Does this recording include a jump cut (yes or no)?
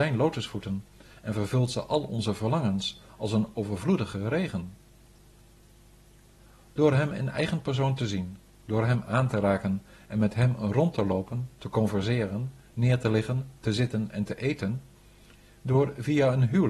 no